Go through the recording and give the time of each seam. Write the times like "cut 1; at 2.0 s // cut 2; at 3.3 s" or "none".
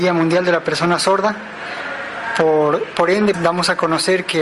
cut 1; at 3.3 s